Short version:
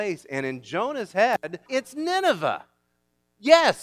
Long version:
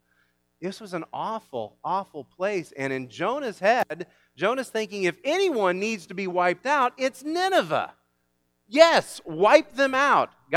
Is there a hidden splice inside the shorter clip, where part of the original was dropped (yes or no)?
yes